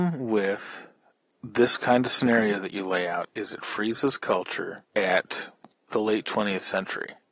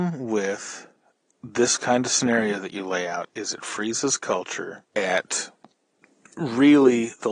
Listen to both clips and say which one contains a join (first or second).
first